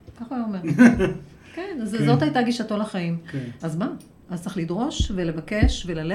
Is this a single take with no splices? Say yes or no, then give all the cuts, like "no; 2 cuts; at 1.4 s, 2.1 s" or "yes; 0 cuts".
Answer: no; 1 cut; at 3.6 s